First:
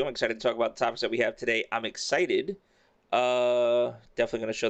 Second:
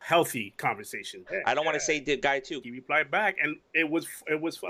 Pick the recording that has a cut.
second; 2 cuts; at 1.3 s, 2.6 s

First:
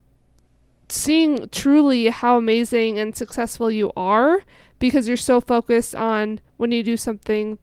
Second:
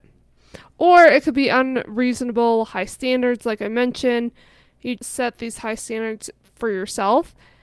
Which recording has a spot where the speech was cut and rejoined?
second; 1 cut; at 5.0 s

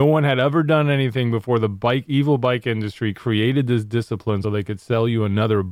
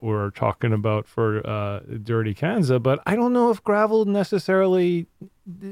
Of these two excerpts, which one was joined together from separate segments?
first; 1 cut; at 4.4 s

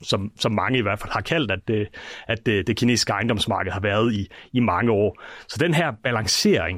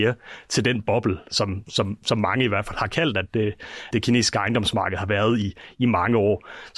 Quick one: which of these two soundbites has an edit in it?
second; 1 cut; at 3.9 s

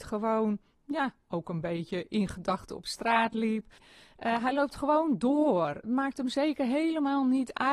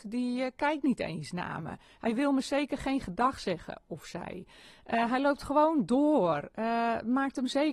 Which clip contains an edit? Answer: first; 2 cuts; at 3.8 s, 5.8 s

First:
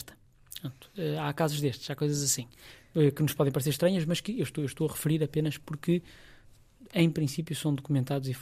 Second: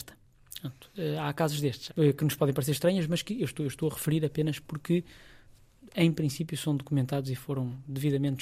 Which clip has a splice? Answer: second; 1 cut; at 1.9 s

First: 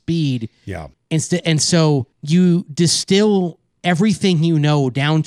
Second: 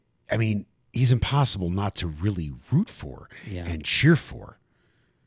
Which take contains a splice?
first; 2 cuts; at 0.9 s, 2.1 s

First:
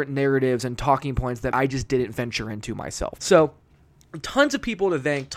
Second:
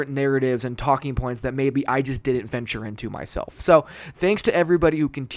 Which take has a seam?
first; 2 cuts; at 1.5 s, 3.2 s

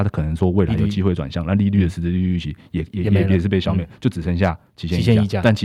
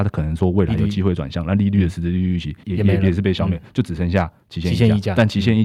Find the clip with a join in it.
second; 1 cut; at 2.6 s

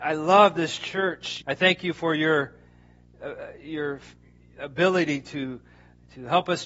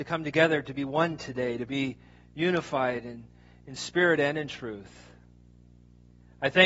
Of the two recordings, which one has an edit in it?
first; 1 cut; at 1.4 s

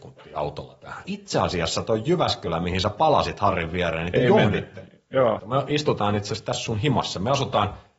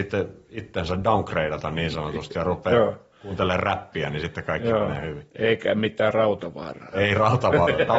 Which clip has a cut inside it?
first; 2 cuts; at 1.0 s, 5.4 s

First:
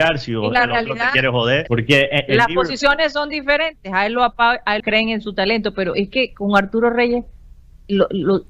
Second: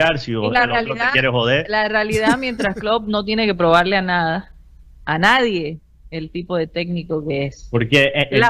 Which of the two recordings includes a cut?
first; 2 cuts; at 1.7 s, 4.8 s

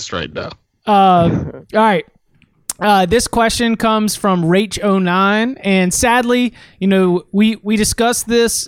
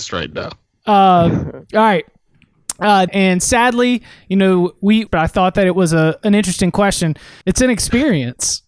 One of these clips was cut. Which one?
second; 3 cuts; at 3.1 s, 5.1 s, 7.4 s

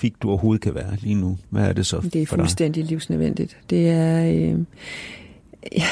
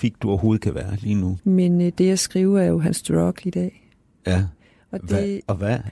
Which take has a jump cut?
second; 1 cut; at 1.4 s

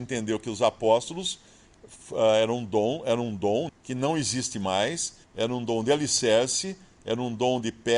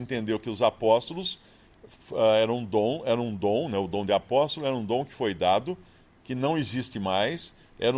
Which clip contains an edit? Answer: first; 2 cuts; at 3.7 s, 5.2 s

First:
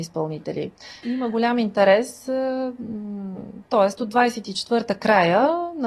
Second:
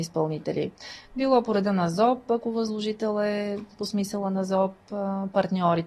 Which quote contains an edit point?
first; 2 cuts; at 1.0 s, 3.6 s

